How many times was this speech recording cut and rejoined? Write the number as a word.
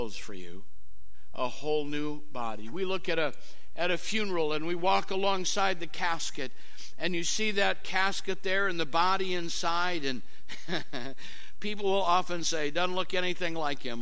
zero